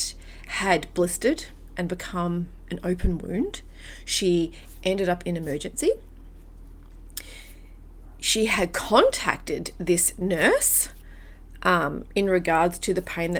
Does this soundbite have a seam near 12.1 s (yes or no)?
no